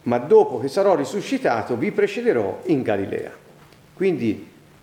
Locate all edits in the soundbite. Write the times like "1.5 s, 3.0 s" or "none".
none